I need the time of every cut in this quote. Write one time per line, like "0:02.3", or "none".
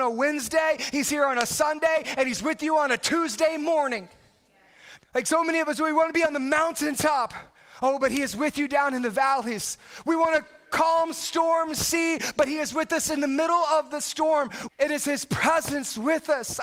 0:05.0
0:14.7